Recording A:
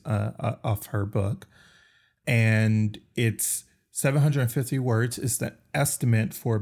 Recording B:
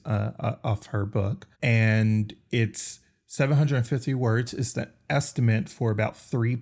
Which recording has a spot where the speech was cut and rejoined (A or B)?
B